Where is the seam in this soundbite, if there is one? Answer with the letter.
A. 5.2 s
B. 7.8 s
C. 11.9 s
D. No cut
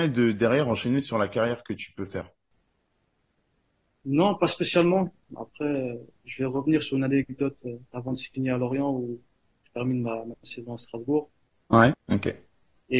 C